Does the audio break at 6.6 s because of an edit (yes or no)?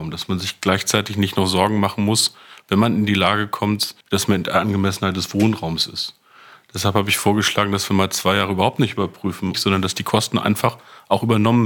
no